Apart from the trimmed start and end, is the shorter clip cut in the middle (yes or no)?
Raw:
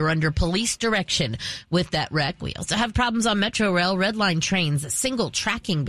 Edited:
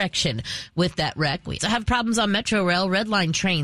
yes